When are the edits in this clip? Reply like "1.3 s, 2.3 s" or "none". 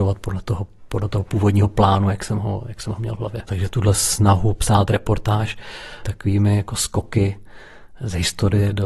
3.5 s